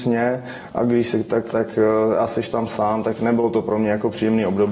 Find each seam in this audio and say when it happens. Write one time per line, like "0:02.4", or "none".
0:01.5